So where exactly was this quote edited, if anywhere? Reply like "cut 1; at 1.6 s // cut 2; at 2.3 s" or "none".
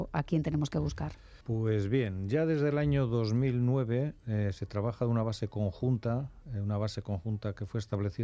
cut 1; at 1.4 s